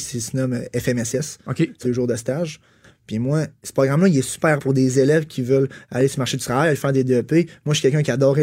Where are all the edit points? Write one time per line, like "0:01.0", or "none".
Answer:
0:01.8
0:04.6

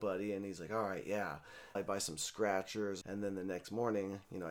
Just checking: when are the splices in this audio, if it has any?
0:01.8
0:03.0

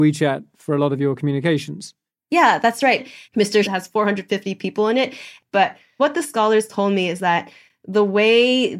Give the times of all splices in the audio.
0:03.6
0:05.5

